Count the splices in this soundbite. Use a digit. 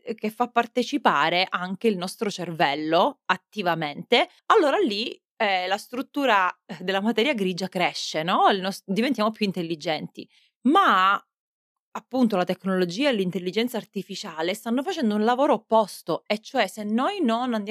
0